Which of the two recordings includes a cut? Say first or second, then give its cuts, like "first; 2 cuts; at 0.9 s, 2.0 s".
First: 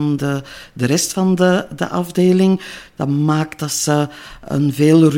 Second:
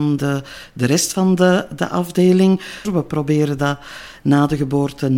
second; 1 cut; at 2.8 s